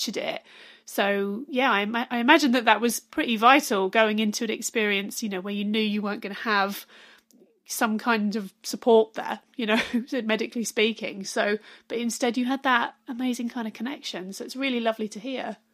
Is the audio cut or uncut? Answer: uncut